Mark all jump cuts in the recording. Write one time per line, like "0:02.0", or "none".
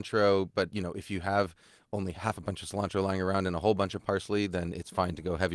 none